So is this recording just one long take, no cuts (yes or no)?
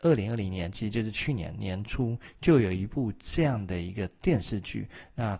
yes